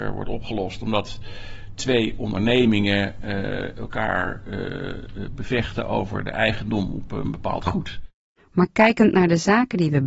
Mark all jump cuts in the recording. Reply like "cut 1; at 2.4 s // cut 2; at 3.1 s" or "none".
cut 1; at 8.4 s